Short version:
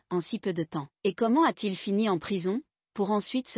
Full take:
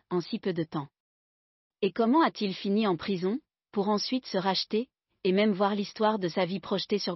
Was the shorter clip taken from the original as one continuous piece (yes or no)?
no